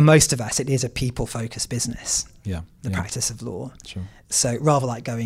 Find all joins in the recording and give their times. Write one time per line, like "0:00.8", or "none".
0:02.7